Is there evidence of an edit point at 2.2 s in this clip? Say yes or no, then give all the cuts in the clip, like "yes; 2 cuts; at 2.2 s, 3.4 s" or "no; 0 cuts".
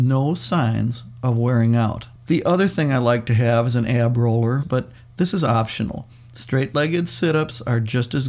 yes; 2 cuts; at 2.2 s, 4.6 s